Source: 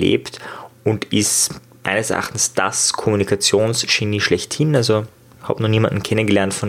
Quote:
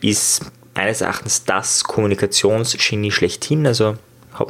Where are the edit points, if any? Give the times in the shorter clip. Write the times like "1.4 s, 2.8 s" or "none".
none

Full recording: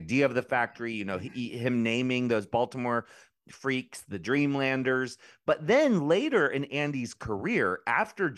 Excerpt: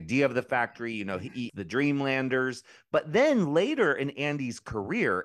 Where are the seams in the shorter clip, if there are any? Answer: 1.5 s

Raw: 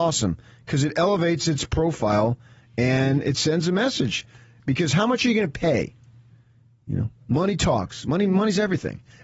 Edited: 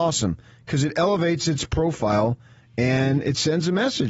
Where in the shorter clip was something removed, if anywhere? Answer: none

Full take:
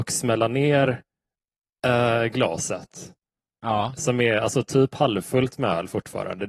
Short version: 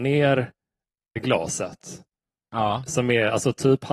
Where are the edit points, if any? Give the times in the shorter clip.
1.2 s

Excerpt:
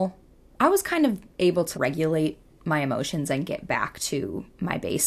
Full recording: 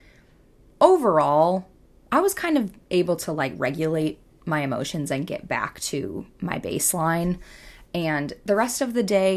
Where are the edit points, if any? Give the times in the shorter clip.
1.7 s

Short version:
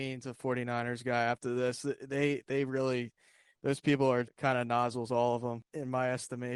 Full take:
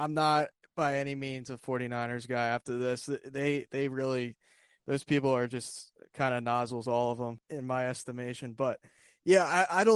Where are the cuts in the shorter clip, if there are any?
4.3 s

